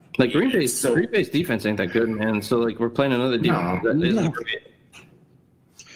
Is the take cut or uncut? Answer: uncut